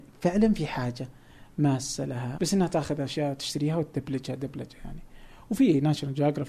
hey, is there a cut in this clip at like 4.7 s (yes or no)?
no